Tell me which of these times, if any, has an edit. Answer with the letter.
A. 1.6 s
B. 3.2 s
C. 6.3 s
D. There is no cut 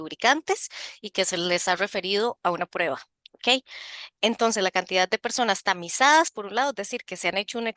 D